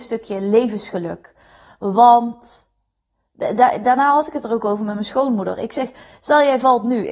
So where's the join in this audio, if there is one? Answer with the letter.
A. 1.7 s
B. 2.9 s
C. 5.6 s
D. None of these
D